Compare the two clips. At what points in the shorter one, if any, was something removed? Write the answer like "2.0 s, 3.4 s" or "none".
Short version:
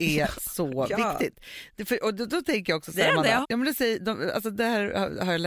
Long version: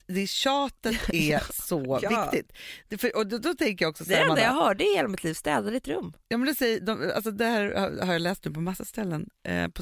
3.4 s